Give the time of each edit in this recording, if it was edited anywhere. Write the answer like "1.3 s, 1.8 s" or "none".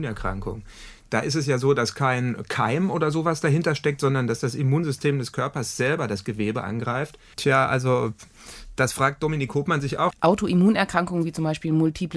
7.3 s, 10.1 s